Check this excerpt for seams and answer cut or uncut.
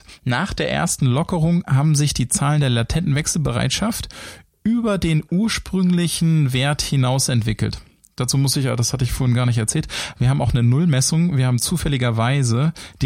uncut